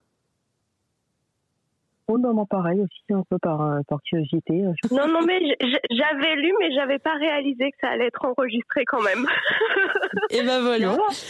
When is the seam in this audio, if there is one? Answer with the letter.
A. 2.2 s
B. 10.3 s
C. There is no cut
C